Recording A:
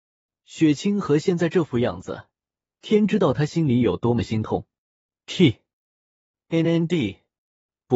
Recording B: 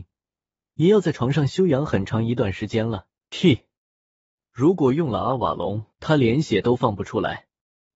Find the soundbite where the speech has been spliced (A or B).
B